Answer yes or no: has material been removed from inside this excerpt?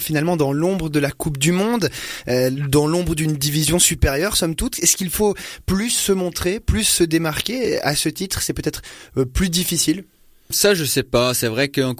no